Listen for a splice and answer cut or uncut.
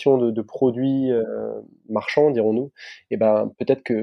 uncut